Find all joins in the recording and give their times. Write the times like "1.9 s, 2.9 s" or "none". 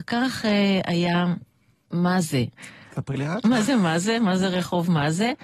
2.5 s